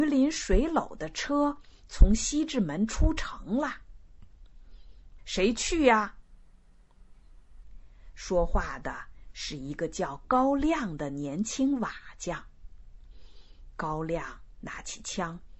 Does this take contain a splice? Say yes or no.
yes